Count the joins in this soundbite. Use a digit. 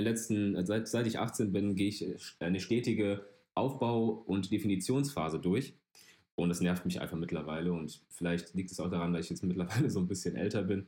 0